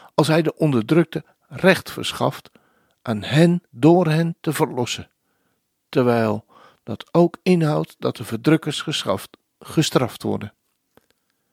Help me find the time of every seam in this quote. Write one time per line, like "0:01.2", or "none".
0:03.7